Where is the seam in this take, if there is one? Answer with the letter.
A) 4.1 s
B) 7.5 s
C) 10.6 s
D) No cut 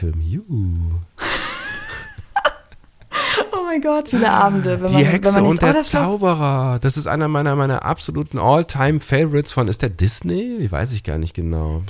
A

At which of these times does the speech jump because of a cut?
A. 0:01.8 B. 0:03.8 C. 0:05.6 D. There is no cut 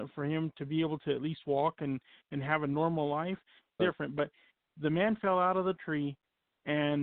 B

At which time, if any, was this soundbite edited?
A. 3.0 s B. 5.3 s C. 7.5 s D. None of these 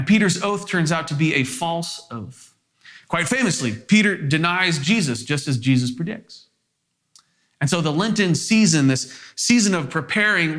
D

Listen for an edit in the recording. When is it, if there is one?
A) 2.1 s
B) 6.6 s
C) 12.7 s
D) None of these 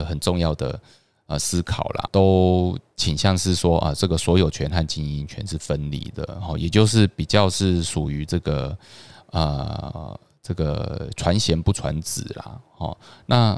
A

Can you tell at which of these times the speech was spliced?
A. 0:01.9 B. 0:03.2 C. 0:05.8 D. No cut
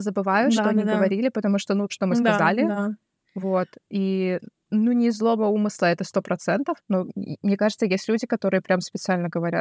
A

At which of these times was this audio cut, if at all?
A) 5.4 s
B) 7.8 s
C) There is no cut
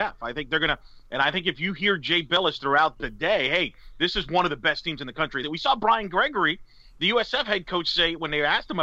A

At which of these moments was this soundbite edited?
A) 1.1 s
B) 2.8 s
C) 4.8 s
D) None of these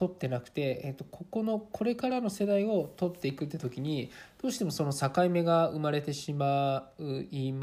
D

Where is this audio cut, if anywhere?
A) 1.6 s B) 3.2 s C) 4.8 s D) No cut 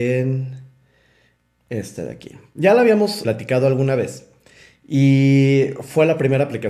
B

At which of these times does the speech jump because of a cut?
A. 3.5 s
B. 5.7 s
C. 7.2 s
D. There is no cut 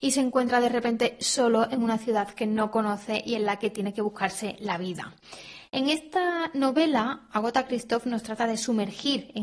D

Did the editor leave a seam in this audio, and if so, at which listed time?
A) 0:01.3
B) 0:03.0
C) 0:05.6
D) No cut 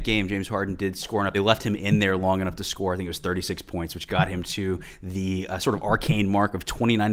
D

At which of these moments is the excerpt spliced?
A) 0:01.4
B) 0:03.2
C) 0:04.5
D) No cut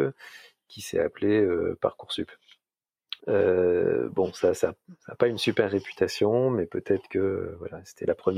B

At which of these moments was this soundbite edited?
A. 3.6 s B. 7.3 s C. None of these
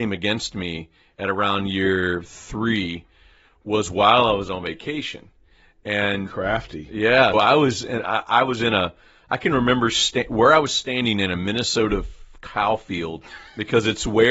B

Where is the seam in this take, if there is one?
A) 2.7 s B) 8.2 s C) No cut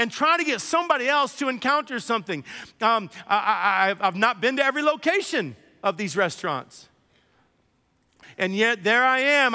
B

